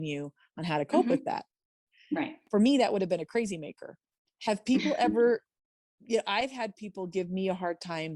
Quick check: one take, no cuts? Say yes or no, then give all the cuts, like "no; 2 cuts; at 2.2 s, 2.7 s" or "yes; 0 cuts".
yes; 0 cuts